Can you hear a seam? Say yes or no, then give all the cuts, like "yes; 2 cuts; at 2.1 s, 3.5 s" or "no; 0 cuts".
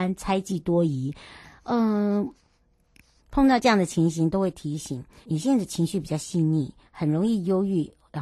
yes; 2 cuts; at 3.2 s, 5.2 s